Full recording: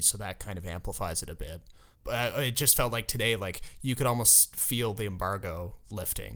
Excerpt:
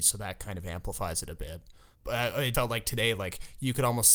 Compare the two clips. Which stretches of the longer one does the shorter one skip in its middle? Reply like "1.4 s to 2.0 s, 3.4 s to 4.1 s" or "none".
2.5 s to 2.8 s